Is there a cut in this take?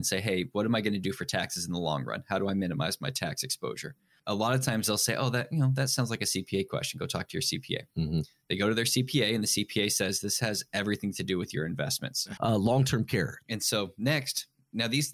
yes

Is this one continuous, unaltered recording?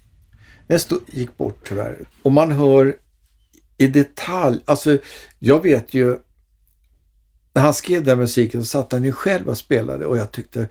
no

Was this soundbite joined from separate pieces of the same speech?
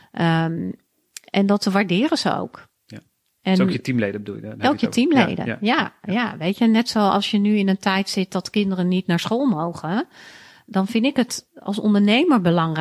no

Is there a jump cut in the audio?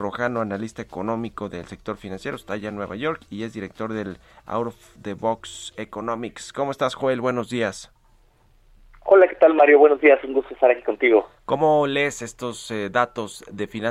no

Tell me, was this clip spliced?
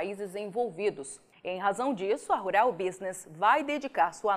yes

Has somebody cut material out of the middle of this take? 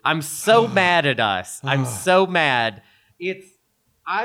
no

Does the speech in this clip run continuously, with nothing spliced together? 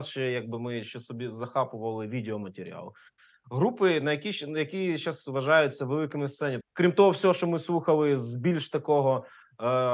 no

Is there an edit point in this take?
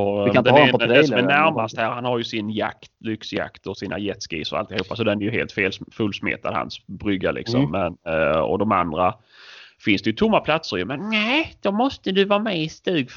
no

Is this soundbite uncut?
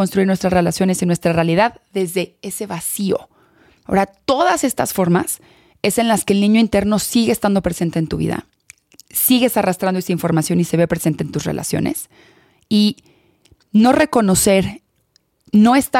no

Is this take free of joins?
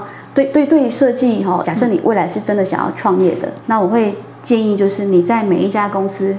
no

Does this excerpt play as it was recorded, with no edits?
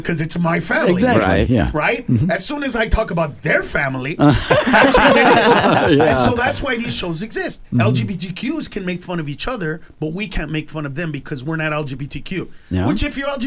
yes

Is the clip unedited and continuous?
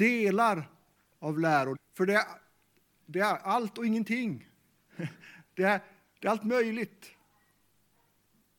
no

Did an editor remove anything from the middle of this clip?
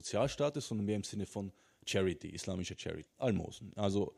yes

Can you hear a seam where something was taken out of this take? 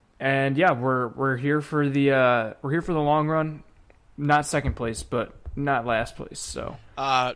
no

